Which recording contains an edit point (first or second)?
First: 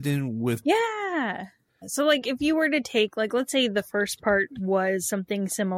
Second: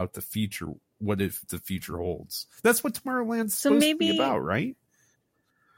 first